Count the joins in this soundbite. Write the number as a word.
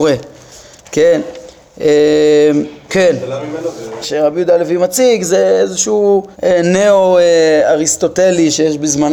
three